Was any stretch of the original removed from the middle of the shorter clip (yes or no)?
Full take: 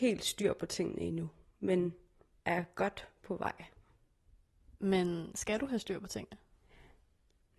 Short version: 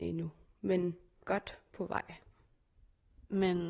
yes